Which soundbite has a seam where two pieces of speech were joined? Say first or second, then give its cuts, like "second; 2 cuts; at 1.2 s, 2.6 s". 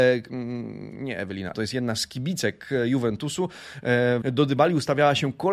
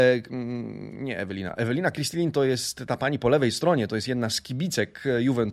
first; 2 cuts; at 1.5 s, 4.2 s